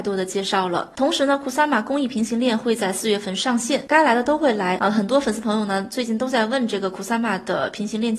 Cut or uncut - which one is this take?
cut